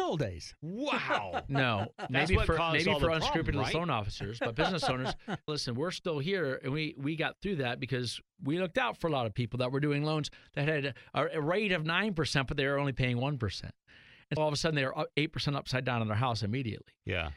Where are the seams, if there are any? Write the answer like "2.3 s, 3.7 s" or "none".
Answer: 5.5 s, 8.3 s, 14.4 s